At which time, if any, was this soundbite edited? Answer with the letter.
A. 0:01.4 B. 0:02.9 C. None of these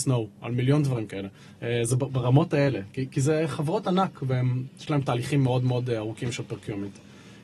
A